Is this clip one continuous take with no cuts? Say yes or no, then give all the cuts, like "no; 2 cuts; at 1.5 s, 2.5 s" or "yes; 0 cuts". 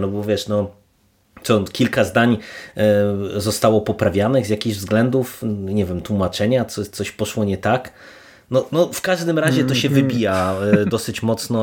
yes; 0 cuts